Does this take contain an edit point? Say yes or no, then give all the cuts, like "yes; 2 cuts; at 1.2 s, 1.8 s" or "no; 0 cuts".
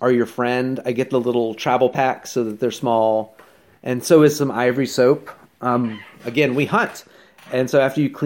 no; 0 cuts